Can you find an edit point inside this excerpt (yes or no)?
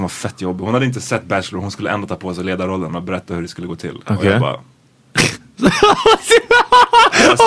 no